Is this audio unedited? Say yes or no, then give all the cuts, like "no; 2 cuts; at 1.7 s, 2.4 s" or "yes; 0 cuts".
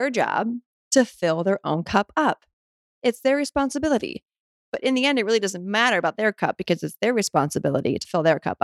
no; 1 cut; at 4.6 s